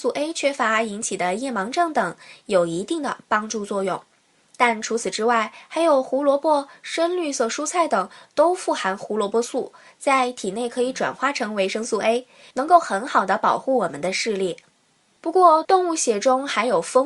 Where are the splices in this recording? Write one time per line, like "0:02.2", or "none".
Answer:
0:15.6

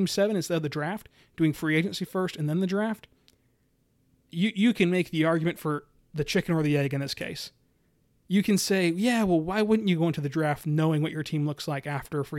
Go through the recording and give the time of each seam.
none

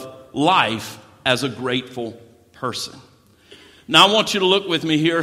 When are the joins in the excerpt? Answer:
none

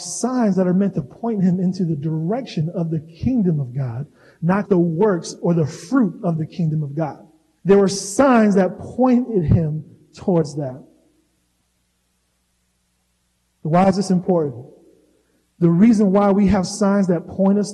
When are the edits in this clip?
0:04.7
0:07.6

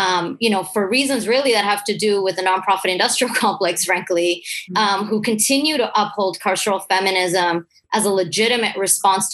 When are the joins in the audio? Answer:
0:04.7

